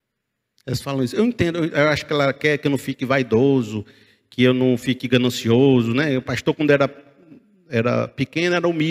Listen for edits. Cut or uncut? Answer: uncut